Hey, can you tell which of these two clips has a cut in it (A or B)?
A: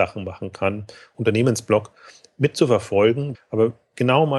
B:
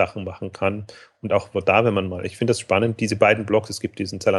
A